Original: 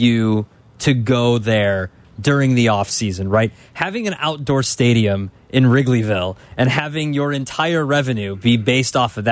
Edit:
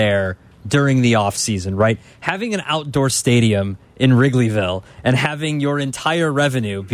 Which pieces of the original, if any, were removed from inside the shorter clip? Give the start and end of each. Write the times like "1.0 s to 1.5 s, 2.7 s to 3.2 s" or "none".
none